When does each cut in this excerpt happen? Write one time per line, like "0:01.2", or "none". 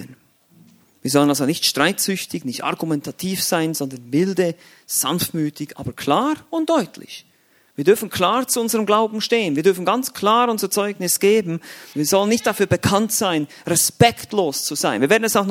0:11.9